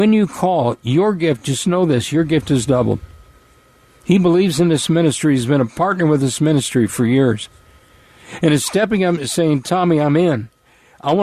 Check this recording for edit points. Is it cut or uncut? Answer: uncut